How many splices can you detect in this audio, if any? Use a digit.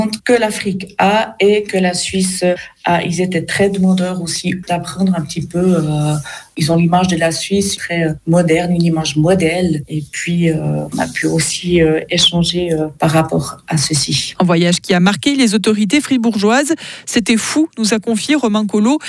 1